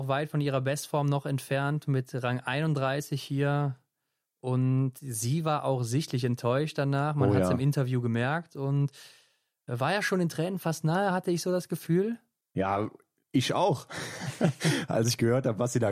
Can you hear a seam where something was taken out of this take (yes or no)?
no